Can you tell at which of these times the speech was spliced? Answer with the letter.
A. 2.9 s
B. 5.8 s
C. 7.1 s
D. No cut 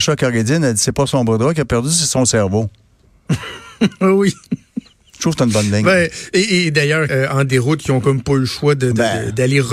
C